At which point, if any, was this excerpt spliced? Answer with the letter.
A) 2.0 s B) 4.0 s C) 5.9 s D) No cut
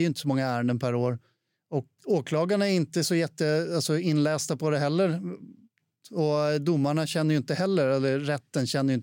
A